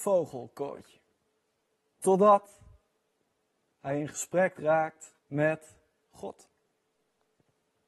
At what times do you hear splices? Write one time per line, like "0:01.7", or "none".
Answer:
0:01.9
0:05.2